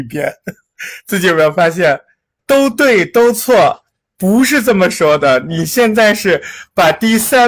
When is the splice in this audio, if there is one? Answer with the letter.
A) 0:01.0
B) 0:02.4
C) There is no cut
B